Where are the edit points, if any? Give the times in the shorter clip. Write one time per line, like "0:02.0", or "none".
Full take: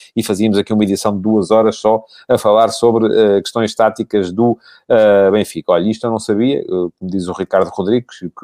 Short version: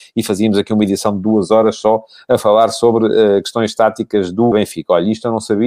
0:04.5